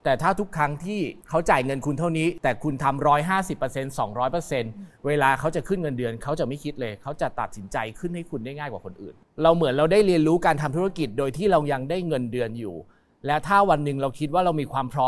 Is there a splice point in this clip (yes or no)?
no